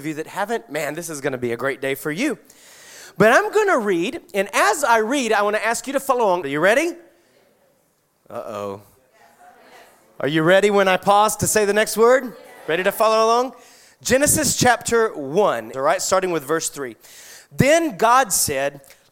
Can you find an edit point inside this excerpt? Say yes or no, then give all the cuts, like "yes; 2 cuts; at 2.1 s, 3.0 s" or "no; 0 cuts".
yes; 2 cuts; at 6.4 s, 15.7 s